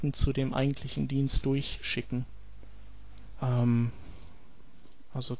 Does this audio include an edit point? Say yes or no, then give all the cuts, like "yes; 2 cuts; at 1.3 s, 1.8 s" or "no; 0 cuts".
yes; 1 cut; at 3.4 s